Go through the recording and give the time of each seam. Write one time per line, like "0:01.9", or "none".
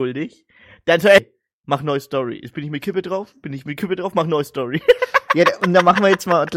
0:01.2